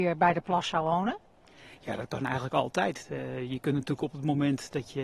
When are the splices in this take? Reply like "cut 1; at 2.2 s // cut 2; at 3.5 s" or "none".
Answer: none